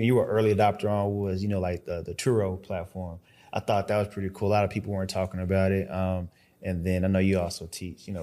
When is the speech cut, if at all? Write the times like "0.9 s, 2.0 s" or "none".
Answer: none